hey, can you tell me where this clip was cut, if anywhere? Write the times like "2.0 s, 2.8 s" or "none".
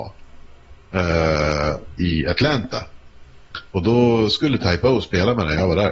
2.0 s